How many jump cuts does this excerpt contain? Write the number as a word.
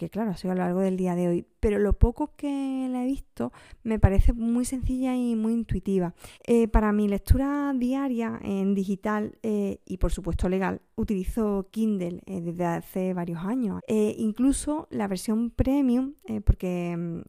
two